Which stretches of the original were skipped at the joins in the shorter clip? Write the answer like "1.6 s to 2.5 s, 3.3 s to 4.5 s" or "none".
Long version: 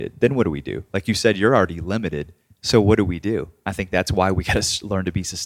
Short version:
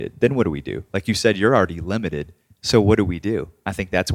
none